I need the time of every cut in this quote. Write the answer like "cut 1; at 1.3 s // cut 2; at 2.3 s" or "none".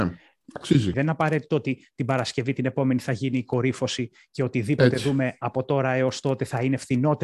cut 1; at 0.9 s

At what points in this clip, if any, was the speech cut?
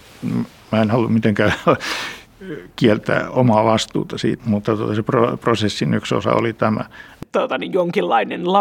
cut 1; at 4.4 s

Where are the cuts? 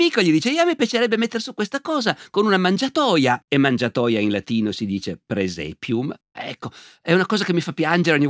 cut 1; at 3.4 s // cut 2; at 6.3 s

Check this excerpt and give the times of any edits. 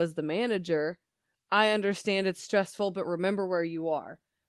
cut 1; at 1.3 s

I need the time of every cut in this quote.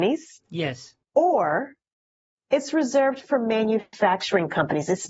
cut 1; at 1.0 s

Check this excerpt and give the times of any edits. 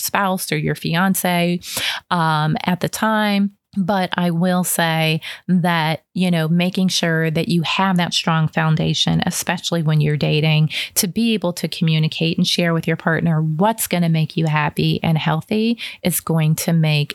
cut 1; at 3.6 s

